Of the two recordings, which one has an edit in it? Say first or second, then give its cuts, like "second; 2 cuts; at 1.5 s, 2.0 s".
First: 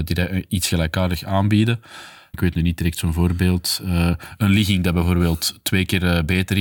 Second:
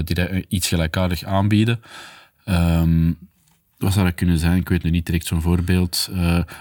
first; 1 cut; at 2.3 s